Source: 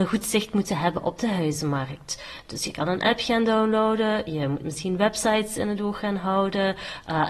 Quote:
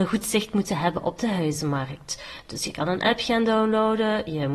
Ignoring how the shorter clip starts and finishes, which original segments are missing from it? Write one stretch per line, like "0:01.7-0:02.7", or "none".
none